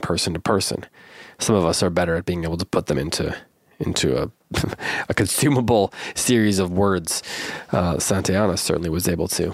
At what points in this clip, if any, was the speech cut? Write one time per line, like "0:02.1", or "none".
none